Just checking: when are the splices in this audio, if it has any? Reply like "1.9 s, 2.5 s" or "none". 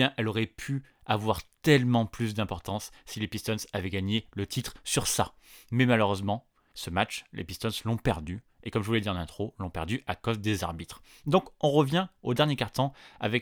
none